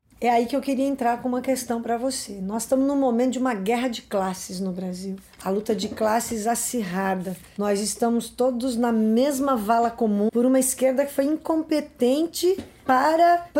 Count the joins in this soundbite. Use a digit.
1